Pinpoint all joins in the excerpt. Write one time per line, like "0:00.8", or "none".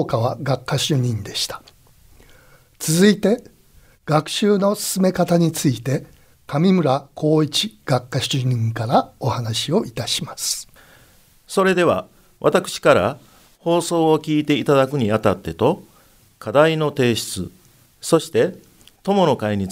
none